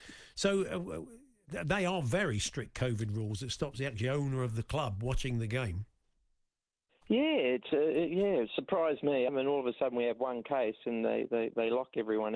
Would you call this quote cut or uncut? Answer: cut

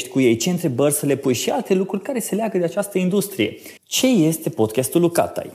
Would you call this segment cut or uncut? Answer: cut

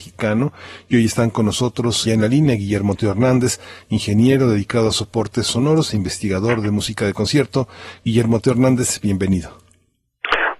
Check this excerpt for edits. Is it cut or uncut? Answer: cut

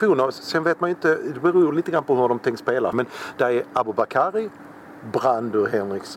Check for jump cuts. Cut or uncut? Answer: cut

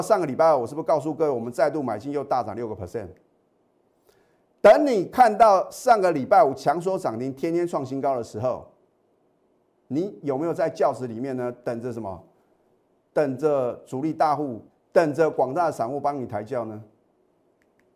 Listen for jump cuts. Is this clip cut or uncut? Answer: cut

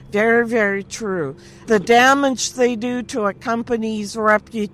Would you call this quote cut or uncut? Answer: cut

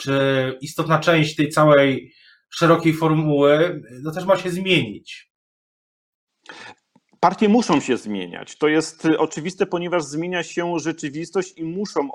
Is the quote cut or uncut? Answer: uncut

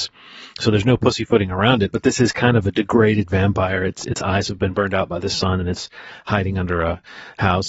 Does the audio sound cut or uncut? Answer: uncut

